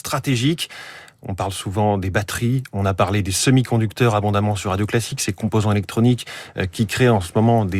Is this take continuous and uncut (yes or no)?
yes